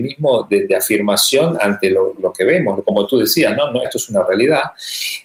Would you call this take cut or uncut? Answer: cut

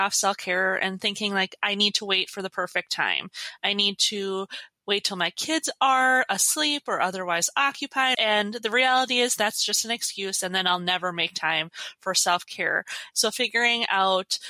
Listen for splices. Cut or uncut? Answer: cut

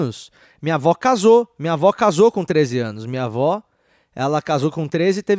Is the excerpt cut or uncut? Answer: uncut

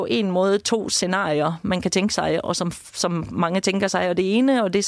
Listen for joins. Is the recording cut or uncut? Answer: uncut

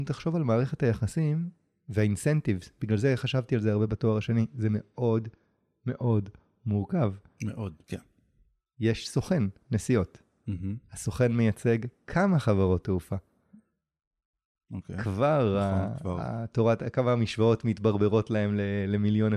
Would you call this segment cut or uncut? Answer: cut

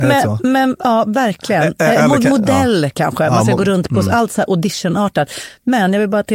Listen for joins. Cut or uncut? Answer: uncut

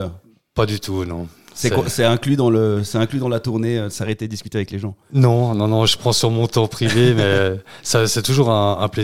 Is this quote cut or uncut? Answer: uncut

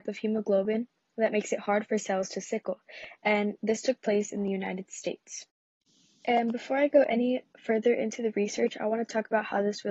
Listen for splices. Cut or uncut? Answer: uncut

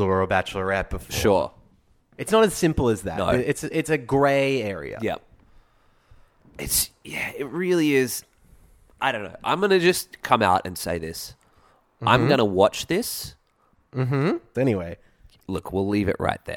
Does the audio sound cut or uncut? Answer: cut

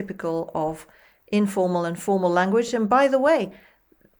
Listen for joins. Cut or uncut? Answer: uncut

